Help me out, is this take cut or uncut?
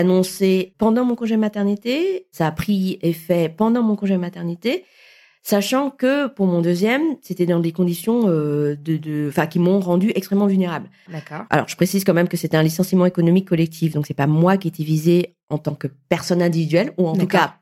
cut